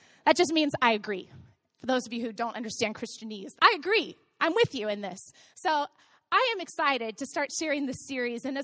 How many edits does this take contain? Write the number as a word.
one